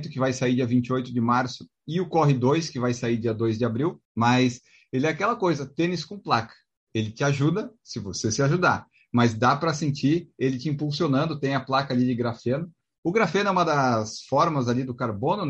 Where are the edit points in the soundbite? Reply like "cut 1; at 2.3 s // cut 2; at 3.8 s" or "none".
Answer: cut 1; at 4.0 s